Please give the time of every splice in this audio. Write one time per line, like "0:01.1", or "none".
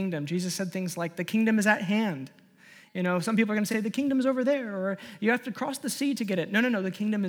none